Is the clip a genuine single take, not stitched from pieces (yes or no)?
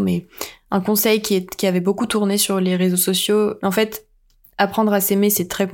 no